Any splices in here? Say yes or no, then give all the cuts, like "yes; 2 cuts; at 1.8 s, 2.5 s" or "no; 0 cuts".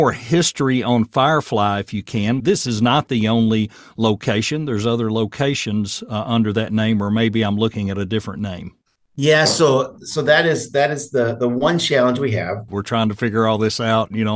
yes; 2 cuts; at 2.4 s, 12.7 s